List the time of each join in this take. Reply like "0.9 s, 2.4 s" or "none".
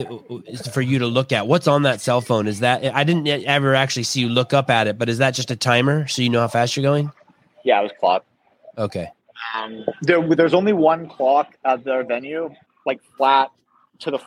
12.7 s

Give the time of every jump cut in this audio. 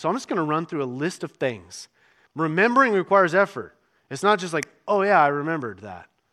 2.3 s

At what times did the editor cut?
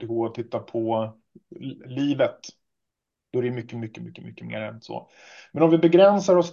3.7 s

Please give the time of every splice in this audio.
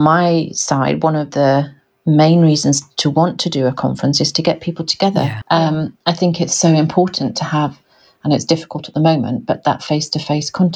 5.4 s

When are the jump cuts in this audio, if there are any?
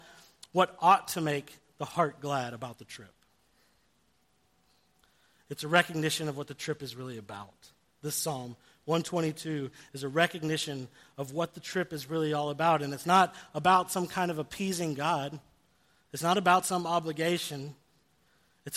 none

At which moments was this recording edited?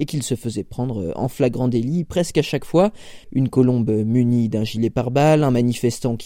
3.2 s

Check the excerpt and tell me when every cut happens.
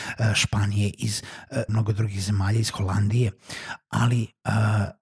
1.7 s

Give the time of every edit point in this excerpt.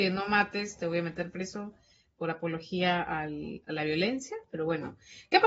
none

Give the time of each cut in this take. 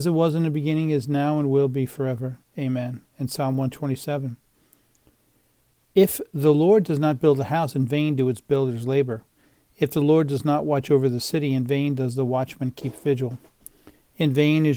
none

